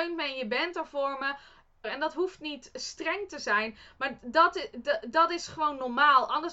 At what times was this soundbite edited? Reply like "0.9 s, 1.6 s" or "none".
1.8 s